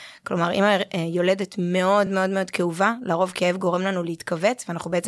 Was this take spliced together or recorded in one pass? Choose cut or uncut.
uncut